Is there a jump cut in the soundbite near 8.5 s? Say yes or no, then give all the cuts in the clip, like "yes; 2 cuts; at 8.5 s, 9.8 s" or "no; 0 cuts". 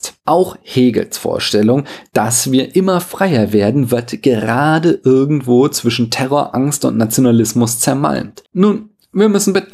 yes; 1 cut; at 8.5 s